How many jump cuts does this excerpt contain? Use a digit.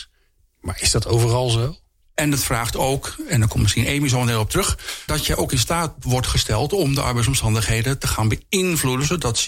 2